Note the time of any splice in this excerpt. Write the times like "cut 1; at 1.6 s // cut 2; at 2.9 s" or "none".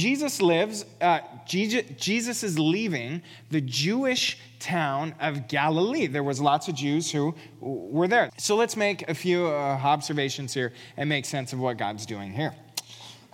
cut 1; at 8.3 s